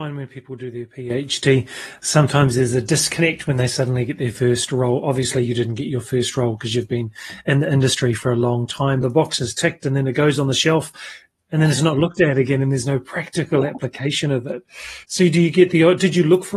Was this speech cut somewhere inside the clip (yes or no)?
yes